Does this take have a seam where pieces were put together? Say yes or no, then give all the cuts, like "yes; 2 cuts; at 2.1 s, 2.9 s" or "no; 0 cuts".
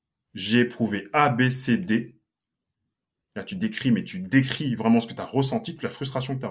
no; 0 cuts